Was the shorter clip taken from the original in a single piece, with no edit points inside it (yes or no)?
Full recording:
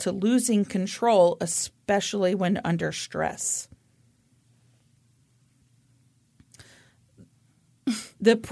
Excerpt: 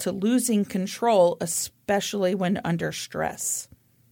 yes